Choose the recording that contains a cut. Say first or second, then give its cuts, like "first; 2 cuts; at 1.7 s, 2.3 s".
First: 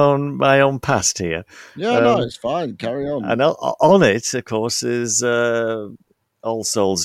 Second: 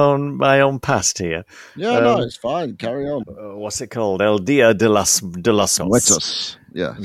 second; 2 cuts; at 3.2 s, 5.8 s